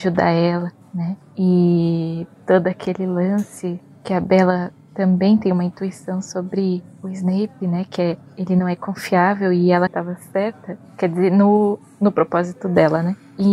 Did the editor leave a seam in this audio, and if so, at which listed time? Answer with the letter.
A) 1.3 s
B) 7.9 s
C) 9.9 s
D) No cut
C